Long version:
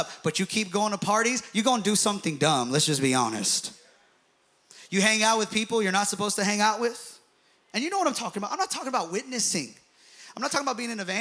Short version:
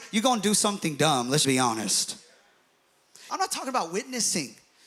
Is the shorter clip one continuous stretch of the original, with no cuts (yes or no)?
no